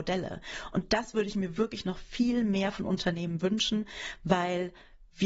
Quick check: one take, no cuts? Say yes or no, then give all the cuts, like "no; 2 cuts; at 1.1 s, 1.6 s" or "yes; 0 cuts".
yes; 0 cuts